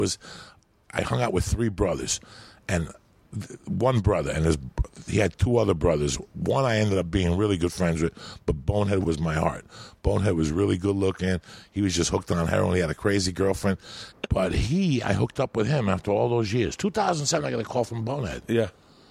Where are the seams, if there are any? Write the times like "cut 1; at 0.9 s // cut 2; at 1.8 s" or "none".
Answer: cut 1; at 14.1 s